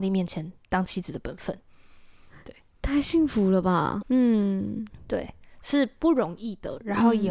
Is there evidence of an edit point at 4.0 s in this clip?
yes; 1 cut; at 4.0 s

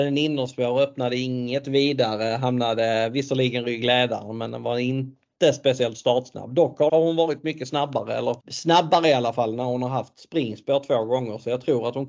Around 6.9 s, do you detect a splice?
yes; 2 cuts; at 6.9 s, 8.4 s

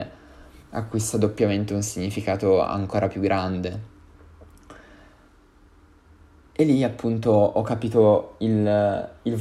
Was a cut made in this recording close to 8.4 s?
no; 0 cuts

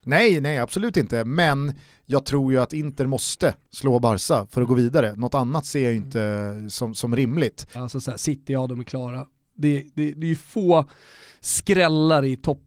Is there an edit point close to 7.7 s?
yes; 1 cut; at 7.7 s

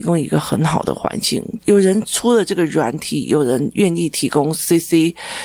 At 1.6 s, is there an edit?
yes; 1 cut; at 1.6 s

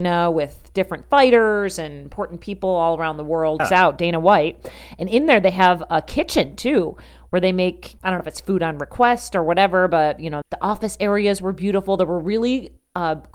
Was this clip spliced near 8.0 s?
yes; 3 cuts; at 3.6 s, 8.0 s, 10.4 s

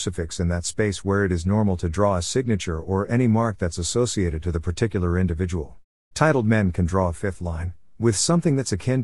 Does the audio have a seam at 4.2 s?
no; 1 cut; at 6.1 s

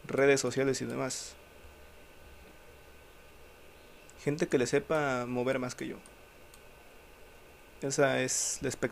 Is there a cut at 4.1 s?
yes; 1 cut; at 4.1 s

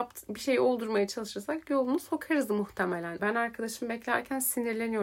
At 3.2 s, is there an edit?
yes; 1 cut; at 3.2 s

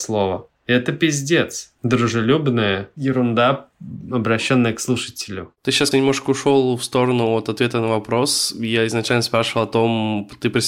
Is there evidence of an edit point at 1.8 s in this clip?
yes; 2 cuts; at 1.8 s, 5.9 s

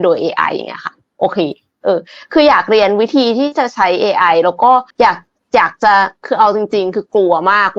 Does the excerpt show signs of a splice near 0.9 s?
no; 2 cuts; at 4.9 s, 6.2 s

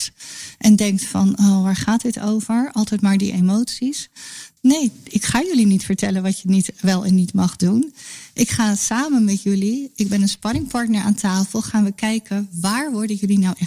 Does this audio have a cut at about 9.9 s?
no; 1 cut; at 4.6 s

